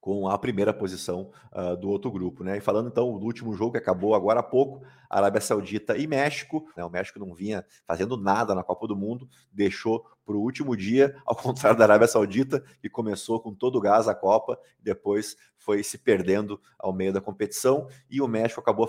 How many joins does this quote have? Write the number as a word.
one